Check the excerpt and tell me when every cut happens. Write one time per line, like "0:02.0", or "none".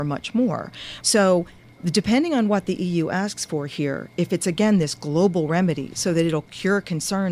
0:01.0